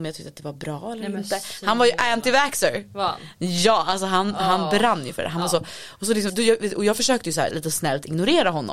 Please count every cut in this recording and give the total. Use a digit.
2